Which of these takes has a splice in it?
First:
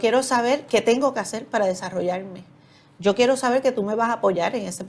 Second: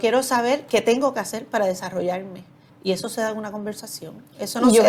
second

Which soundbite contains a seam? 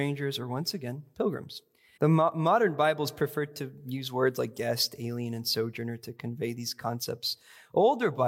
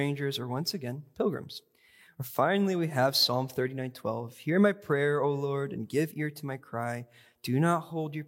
first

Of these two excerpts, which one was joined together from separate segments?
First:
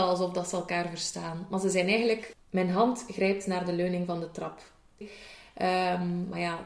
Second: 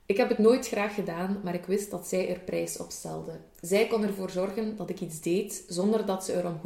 first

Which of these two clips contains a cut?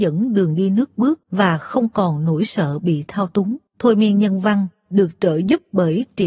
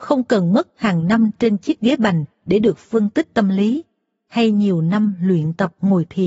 first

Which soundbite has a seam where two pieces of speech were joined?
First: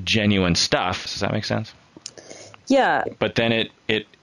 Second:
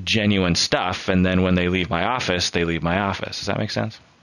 first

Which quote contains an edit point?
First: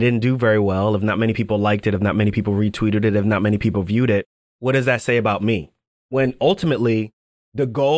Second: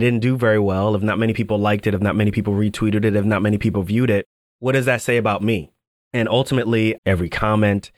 second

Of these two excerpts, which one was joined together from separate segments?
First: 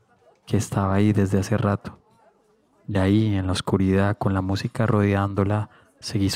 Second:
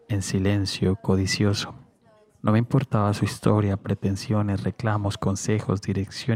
second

